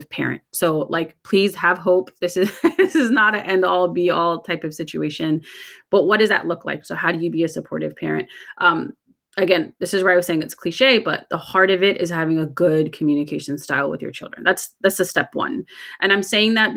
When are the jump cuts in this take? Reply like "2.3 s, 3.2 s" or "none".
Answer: none